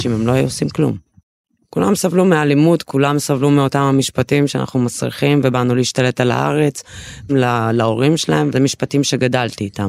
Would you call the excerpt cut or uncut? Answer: cut